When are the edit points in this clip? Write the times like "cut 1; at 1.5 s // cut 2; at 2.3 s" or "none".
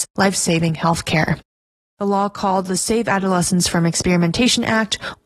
none